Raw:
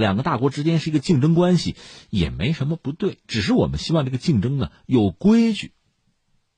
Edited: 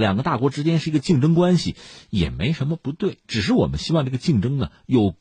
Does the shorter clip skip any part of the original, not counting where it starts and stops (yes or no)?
no